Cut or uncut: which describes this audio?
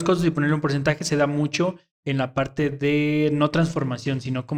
uncut